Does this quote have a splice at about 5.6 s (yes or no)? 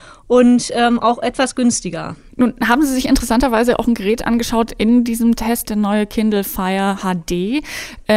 yes